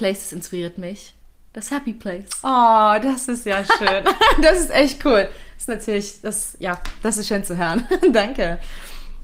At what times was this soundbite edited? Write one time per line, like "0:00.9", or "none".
none